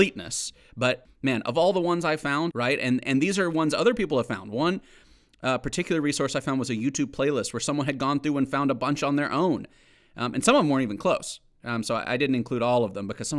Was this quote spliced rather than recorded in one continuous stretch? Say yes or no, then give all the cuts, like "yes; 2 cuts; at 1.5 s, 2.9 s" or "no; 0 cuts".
yes; 1 cut; at 2.5 s